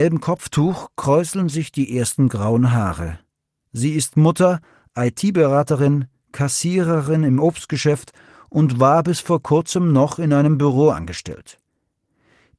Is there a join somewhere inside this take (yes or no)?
no